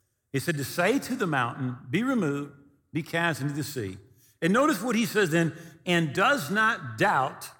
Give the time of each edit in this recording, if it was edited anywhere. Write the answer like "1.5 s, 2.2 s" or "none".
none